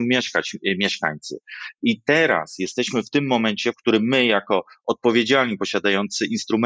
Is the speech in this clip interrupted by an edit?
no; 0 cuts

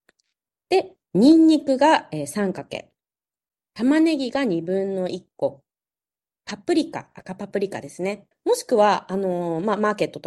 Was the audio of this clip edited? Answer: yes; 1 cut; at 8.3 s

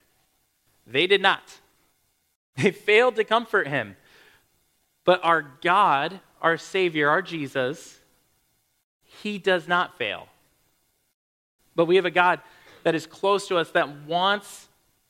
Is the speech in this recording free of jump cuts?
no; 1 cut; at 11.6 s

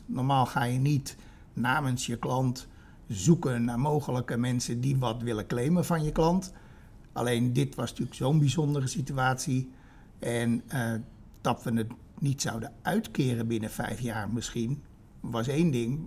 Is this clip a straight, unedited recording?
yes; 0 cuts

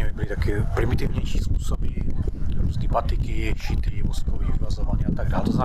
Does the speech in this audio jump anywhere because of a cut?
no; 0 cuts

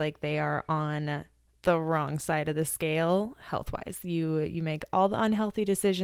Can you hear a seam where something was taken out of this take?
no; 0 cuts

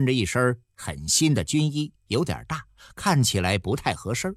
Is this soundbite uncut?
yes; 0 cuts

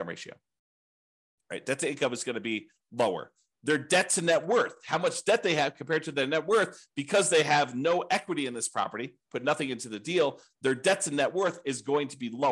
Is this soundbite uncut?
yes; 0 cuts

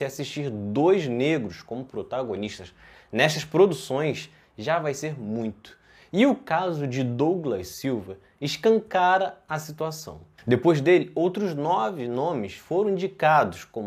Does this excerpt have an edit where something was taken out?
yes; 1 cut; at 10.4 s

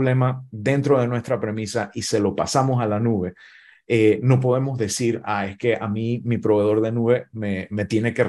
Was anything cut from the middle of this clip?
no; 0 cuts

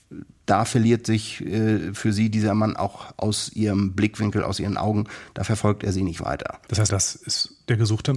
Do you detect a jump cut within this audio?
yes; 1 cut; at 6.9 s

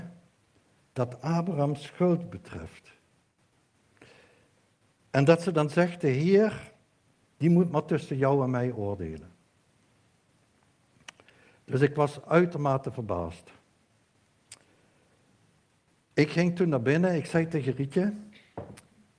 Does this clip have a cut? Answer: no; 0 cuts

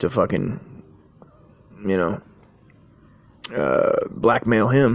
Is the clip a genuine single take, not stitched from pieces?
yes; 0 cuts

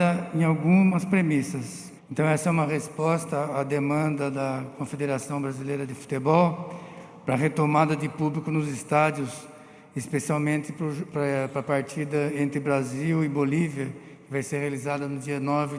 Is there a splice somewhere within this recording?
yes; 1 cut; at 2.0 s

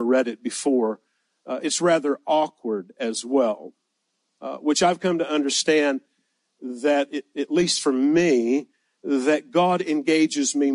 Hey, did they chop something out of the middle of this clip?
yes; 1 cut; at 1.6 s

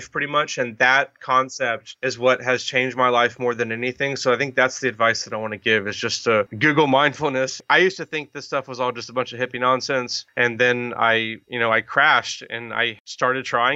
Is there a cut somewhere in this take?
no; 0 cuts

